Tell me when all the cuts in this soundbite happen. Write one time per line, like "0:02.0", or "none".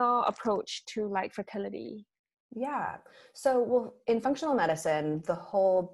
none